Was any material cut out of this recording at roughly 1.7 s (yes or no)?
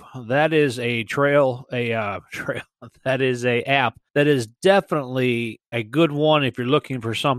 no